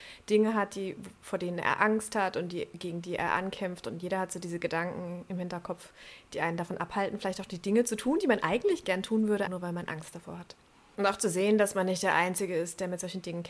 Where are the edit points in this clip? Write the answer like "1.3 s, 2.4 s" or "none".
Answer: 9.5 s, 10.9 s